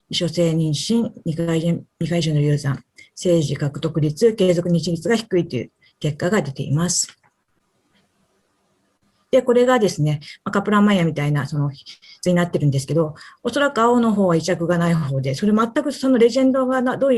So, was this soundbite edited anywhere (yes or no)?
no